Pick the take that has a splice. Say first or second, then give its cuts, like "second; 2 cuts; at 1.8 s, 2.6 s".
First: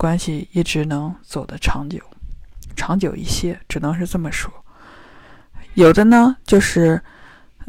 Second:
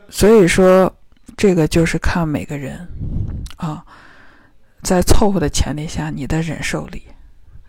first; 1 cut; at 5.7 s